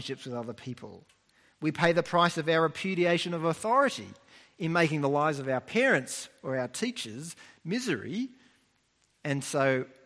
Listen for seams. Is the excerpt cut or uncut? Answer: uncut